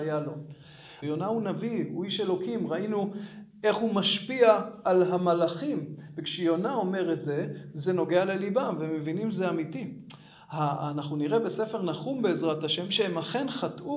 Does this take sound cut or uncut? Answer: cut